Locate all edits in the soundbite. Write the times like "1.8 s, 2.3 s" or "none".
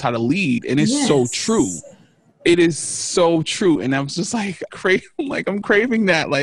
4.7 s